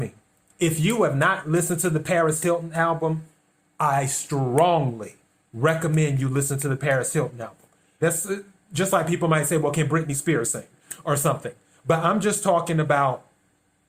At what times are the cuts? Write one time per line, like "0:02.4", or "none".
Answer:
0:08.0